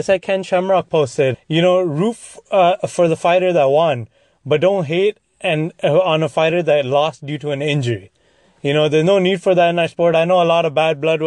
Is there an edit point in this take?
yes; 1 cut; at 1.3 s

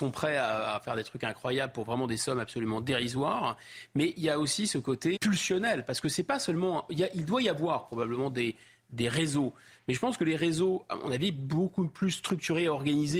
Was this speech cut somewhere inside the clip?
yes; 1 cut; at 5.2 s

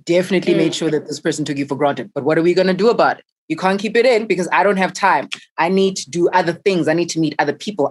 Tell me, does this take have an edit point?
yes; 1 cut; at 3.4 s

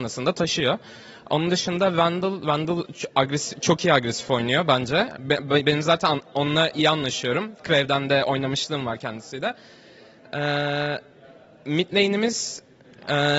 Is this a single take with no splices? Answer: yes; 0 cuts

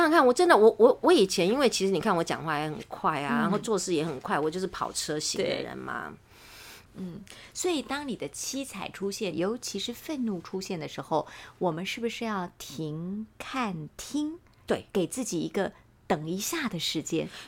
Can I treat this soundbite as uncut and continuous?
no; 2 cuts; at 6.8 s, 9.3 s

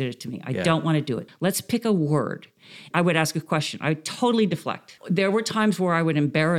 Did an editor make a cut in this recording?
yes; 3 cuts; at 1.3 s, 2.9 s, 5.0 s

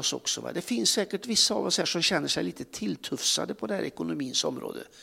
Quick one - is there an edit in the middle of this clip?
no; 0 cuts

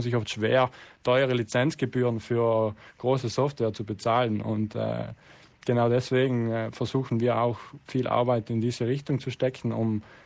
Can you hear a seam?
no; 0 cuts

